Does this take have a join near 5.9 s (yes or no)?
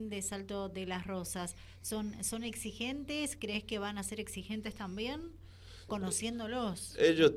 yes